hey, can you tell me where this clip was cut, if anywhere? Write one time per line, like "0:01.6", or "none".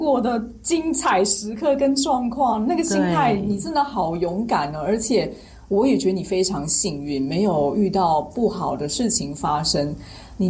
none